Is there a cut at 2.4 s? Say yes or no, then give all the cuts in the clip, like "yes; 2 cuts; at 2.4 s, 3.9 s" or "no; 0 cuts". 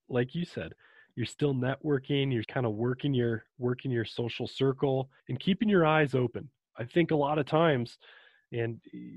yes; 2 cuts; at 2.4 s, 5.2 s